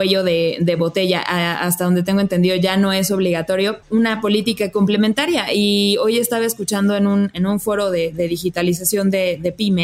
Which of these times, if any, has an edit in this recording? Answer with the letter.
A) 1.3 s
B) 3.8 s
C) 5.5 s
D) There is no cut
B